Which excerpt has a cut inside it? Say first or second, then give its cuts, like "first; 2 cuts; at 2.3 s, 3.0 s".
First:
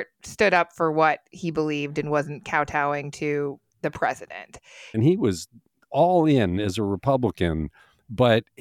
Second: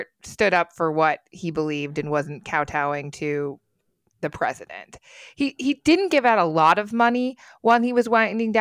first; 2 cuts; at 3.7 s, 4.9 s